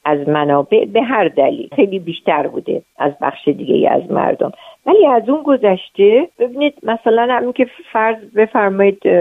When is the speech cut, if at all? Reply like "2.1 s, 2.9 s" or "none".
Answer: 1.7 s